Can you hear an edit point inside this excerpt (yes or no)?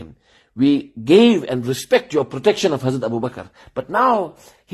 no